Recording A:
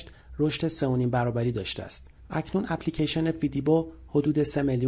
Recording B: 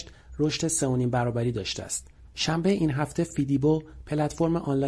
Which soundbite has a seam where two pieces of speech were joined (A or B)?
B